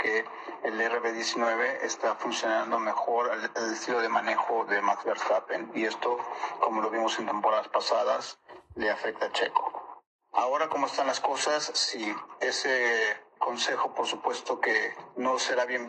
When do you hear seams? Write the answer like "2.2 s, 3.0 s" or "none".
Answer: none